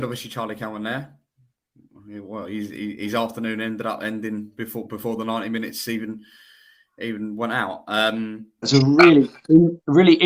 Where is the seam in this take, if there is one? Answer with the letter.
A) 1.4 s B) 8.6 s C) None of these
B